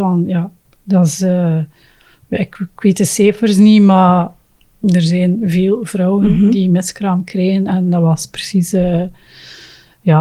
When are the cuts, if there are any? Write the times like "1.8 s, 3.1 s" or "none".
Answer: none